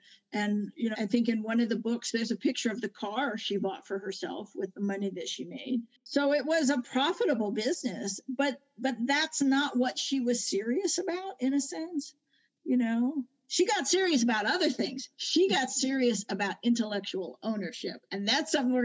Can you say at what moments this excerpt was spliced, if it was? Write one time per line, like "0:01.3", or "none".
0:00.9

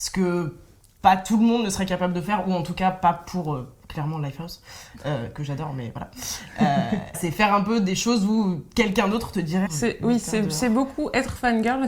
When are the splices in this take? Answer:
0:07.1
0:09.7

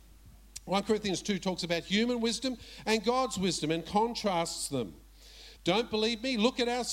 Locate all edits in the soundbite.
0:05.6

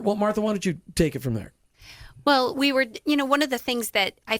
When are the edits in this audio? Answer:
none

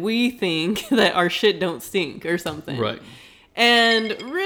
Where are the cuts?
none

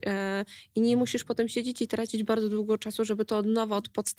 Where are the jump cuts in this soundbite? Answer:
none

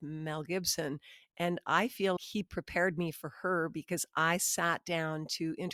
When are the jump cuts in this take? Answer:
0:02.2

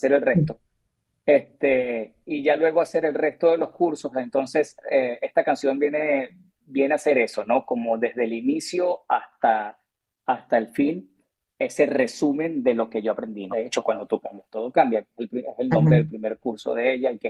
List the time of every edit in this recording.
0:13.5

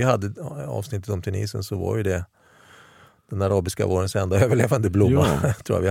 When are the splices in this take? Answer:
none

